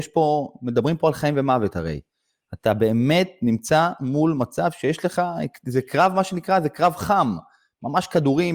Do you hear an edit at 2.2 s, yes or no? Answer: no